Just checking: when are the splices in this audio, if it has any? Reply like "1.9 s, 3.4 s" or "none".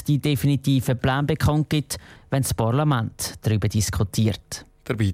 2.2 s